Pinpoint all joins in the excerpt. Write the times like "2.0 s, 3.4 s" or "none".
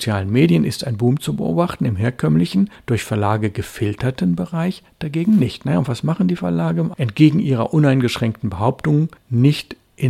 6.9 s